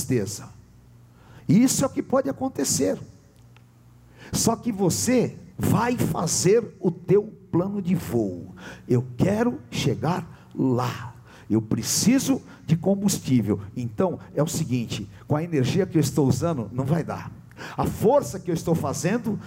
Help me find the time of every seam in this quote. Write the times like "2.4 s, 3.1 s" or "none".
5.5 s